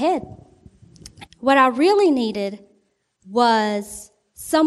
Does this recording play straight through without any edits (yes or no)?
no